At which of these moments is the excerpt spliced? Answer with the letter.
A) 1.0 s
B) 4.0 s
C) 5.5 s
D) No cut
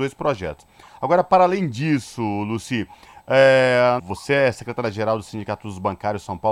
B